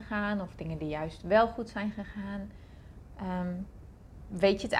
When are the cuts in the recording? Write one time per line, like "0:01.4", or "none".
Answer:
0:03.1